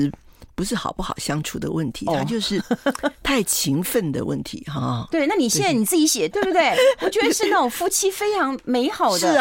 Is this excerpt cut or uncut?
cut